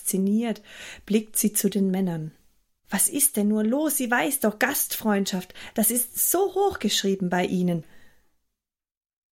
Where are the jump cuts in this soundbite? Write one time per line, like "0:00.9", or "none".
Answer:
0:02.8